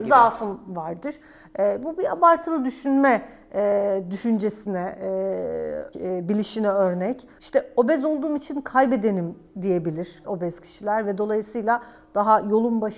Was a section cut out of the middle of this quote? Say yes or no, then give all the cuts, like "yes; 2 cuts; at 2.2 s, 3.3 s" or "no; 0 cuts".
yes; 3 cuts; at 5.9 s, 7.4 s, 10.2 s